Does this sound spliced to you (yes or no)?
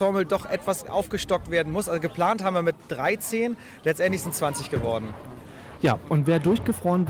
no